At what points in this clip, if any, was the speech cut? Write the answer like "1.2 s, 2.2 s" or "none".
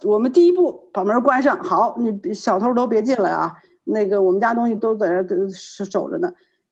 4.8 s